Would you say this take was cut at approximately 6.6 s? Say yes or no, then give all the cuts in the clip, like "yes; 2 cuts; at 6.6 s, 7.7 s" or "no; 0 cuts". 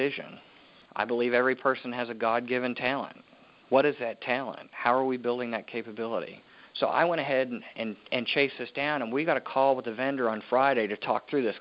yes; 1 cut; at 6.6 s